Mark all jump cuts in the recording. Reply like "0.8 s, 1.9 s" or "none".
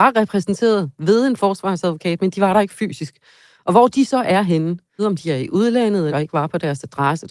5.0 s, 6.1 s